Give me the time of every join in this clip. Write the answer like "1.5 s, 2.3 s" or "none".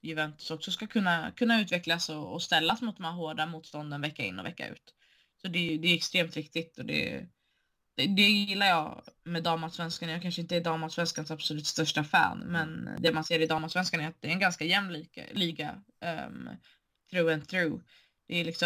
9.2 s